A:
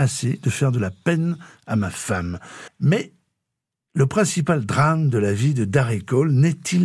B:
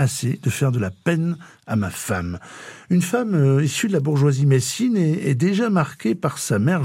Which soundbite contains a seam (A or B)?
A